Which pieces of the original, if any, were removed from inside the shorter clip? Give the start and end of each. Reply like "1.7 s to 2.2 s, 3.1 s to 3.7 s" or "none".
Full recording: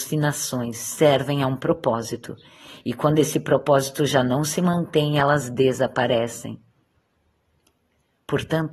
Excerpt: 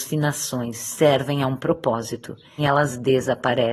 2.6 s to 5.1 s